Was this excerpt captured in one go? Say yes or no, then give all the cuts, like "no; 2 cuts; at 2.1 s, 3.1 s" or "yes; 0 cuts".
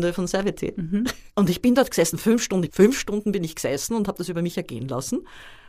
no; 2 cuts; at 1.3 s, 2.7 s